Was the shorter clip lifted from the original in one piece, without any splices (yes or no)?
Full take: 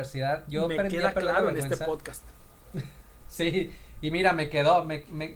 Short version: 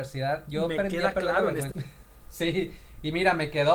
no